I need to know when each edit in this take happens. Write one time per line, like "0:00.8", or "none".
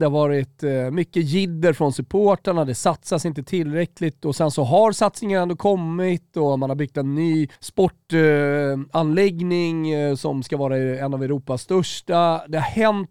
0:07.6